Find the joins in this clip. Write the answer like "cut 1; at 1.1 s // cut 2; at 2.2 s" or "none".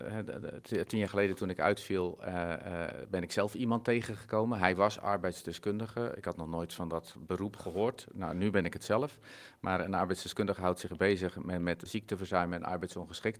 cut 1; at 11.9 s